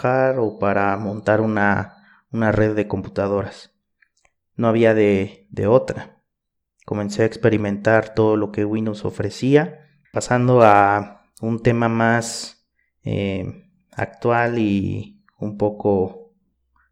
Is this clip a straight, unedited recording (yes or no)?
no